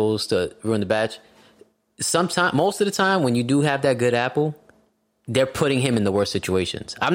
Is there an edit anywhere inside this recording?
no; 0 cuts

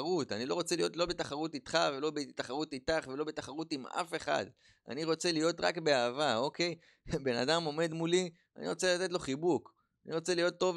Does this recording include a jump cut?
no; 0 cuts

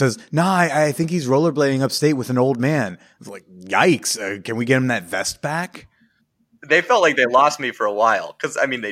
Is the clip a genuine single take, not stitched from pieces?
yes; 0 cuts

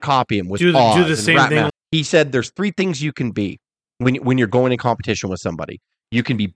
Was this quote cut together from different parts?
yes; 1 cut; at 1.7 s

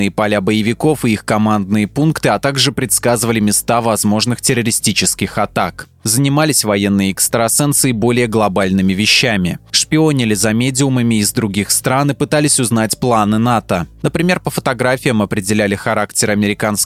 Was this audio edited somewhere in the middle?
no; 0 cuts

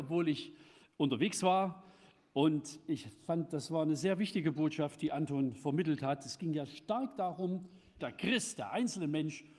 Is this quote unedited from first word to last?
no; 1 cut; at 8.0 s

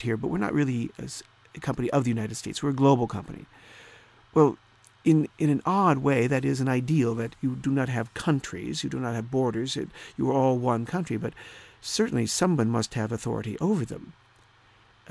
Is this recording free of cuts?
yes; 0 cuts

